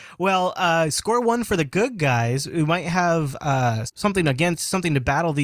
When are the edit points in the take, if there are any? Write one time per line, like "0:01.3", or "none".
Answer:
0:03.9